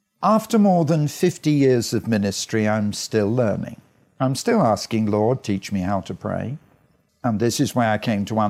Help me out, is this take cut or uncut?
cut